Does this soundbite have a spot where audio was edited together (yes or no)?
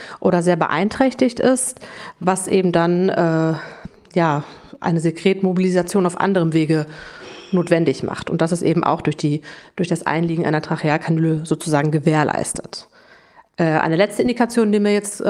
no